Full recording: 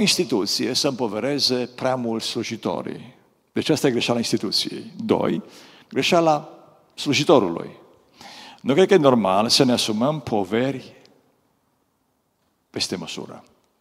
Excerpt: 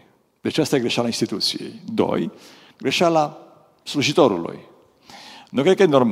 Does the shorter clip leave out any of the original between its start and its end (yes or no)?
no